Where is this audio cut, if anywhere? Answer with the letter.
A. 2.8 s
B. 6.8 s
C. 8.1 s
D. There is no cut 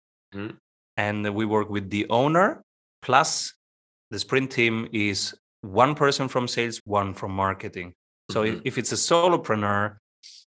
B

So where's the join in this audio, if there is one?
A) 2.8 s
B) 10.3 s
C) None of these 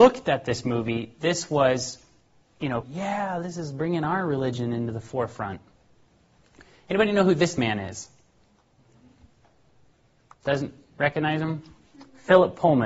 A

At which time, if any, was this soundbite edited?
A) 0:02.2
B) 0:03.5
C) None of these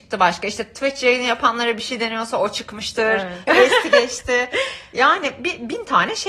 B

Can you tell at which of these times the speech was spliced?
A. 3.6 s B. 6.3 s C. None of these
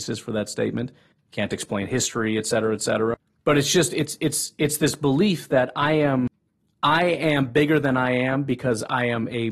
C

